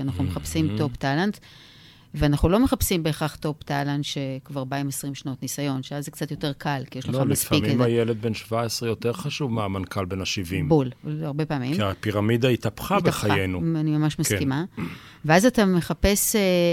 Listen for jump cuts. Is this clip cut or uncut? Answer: uncut